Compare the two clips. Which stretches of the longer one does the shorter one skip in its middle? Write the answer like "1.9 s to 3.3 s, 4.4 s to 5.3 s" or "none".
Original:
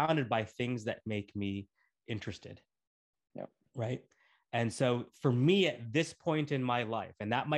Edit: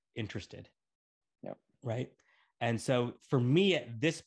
none

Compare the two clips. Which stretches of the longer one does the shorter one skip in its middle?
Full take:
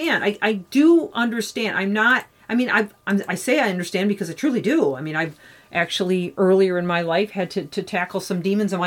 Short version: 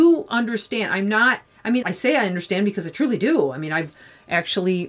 2.7 s to 3.3 s

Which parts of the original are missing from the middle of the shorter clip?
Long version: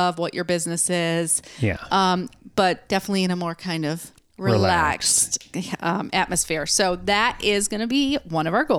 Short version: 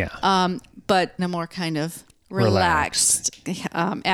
2.9 s to 3.3 s

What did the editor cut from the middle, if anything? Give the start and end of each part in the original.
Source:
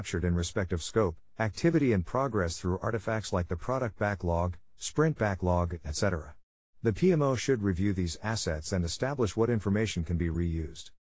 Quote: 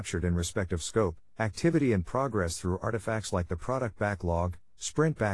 none

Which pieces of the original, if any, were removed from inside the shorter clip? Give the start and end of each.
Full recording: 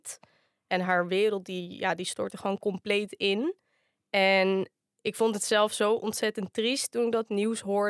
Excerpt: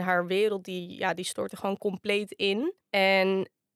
3.6 s to 4.0 s

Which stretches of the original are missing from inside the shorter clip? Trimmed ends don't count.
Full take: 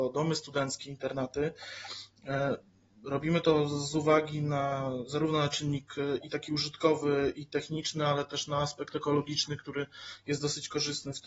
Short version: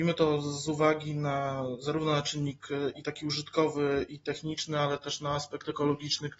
none

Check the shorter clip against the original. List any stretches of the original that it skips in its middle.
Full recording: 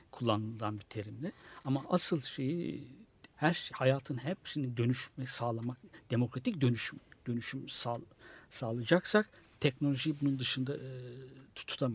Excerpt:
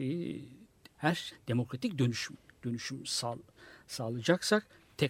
3.7 s to 5.9 s

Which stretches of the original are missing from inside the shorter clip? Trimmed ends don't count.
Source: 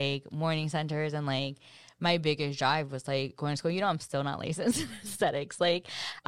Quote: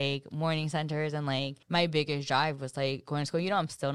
1.6 s to 1.9 s

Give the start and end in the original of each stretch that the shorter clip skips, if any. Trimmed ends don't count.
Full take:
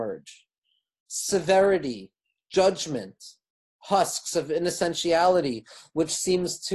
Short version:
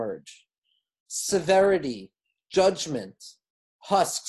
none

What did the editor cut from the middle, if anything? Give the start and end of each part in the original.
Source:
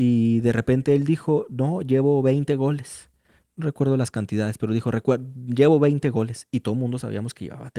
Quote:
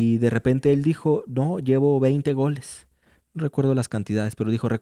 none

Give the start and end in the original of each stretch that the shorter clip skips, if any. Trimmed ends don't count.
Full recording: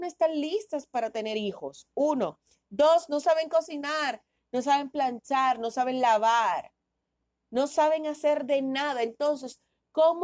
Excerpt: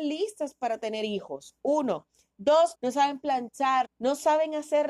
3.1 s to 4.4 s, 5.6 s to 7.4 s

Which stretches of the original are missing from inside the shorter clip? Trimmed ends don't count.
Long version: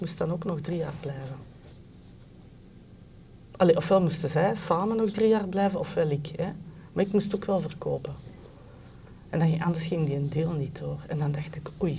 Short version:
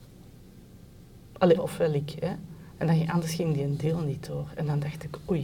3.7 s to 5.7 s, 6.9 s to 9.2 s

